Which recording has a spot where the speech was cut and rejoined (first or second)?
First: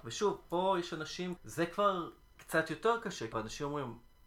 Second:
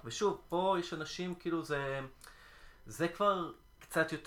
first